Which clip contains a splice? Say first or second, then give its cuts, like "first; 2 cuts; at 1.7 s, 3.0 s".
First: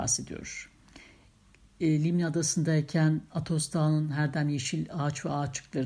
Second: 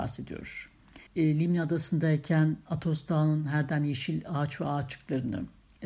second; 1 cut; at 1.1 s